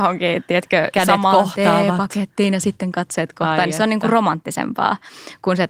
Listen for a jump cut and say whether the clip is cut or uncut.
uncut